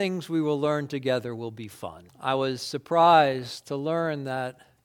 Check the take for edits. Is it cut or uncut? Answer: cut